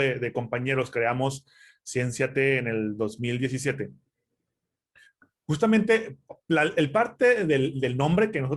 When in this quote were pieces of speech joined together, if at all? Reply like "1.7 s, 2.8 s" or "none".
none